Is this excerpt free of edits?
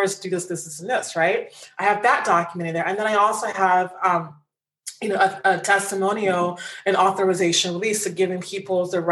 yes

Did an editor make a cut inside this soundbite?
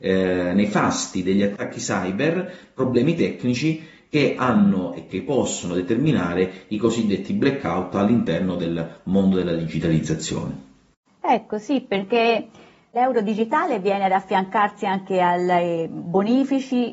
yes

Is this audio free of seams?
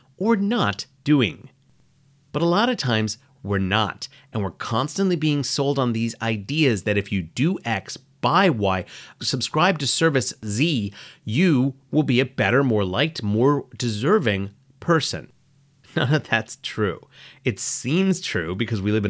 no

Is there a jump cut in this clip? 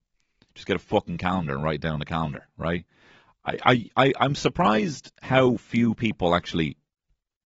no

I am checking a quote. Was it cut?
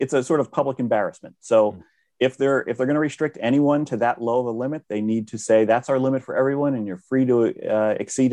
no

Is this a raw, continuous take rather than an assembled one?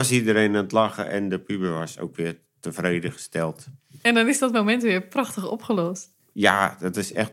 yes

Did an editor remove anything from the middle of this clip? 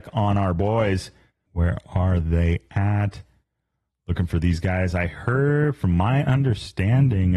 yes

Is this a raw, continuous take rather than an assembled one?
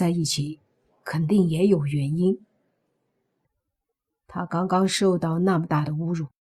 no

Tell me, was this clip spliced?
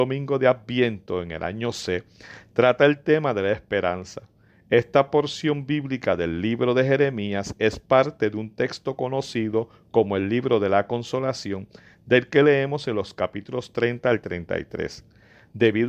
no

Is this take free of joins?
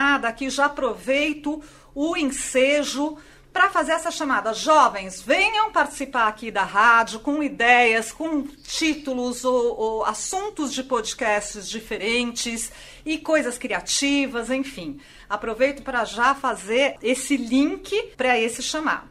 no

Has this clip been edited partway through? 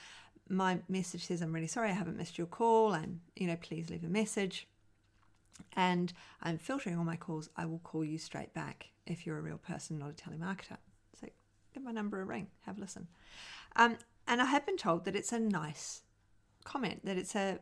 no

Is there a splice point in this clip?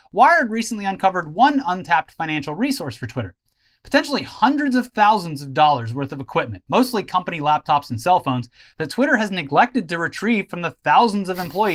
no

